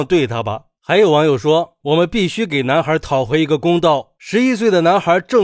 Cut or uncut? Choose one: cut